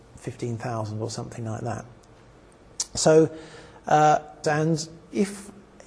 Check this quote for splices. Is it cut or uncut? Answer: cut